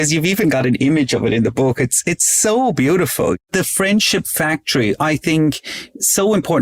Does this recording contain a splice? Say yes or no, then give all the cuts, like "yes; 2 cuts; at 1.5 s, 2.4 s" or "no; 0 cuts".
no; 0 cuts